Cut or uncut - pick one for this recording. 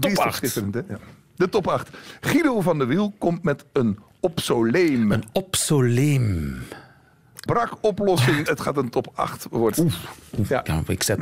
cut